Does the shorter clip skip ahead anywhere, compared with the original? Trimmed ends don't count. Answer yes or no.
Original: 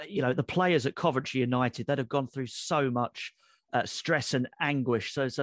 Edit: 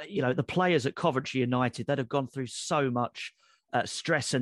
no